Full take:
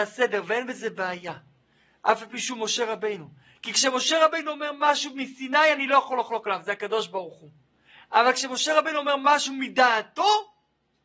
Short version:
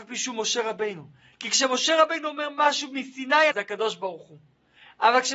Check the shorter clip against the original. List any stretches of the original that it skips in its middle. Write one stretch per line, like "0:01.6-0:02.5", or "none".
0:05.7-0:06.6